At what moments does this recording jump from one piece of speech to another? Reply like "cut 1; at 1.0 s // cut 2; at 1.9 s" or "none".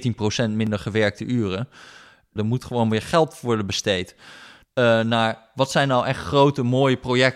cut 1; at 2.4 s // cut 2; at 4.6 s